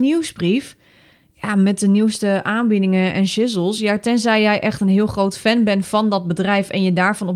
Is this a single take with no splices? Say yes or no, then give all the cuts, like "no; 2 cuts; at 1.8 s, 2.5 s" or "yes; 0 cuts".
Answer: yes; 0 cuts